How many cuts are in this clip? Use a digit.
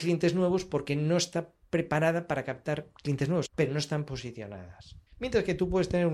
2